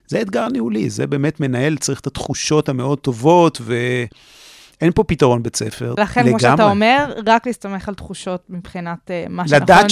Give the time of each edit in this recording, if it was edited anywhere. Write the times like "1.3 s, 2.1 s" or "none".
6.0 s